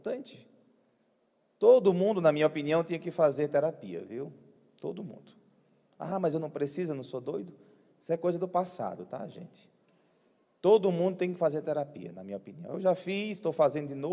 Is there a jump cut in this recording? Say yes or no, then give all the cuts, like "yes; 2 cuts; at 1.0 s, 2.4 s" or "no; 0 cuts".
no; 0 cuts